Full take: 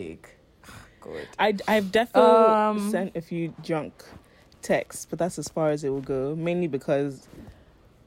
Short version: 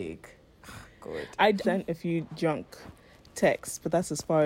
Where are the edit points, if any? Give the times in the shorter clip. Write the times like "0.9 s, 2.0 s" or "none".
1.6 s